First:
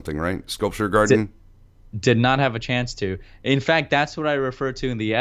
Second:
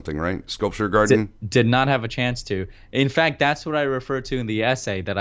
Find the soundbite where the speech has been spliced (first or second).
second